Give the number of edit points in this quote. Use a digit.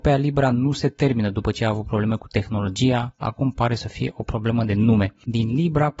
1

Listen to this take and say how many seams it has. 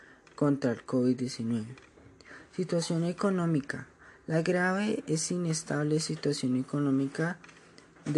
0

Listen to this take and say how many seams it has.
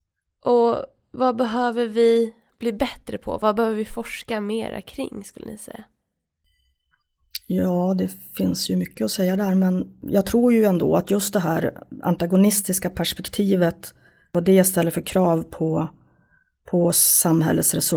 0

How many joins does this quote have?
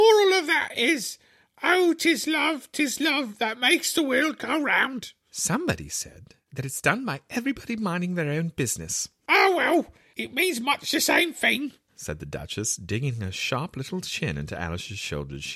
0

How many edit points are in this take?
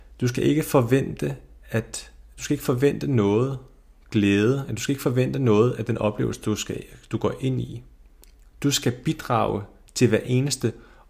0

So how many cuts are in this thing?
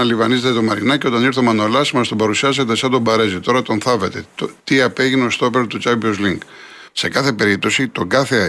2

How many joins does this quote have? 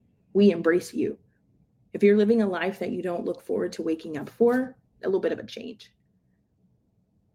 2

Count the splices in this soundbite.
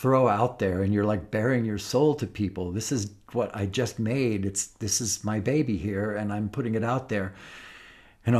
0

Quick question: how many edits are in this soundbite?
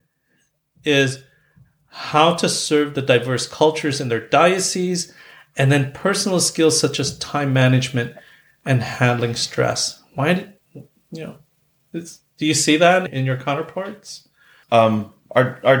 2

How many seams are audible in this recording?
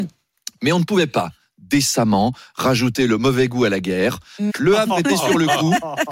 1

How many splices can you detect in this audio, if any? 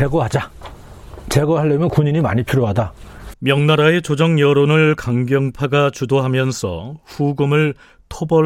1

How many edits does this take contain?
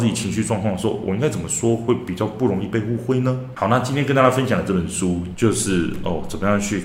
2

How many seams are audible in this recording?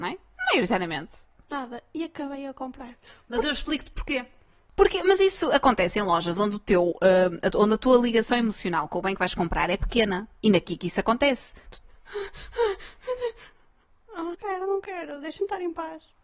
3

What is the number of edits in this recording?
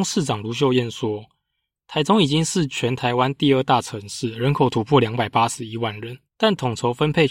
1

